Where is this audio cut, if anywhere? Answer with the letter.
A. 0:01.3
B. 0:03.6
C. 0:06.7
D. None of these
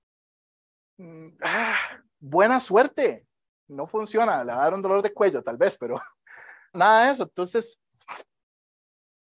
C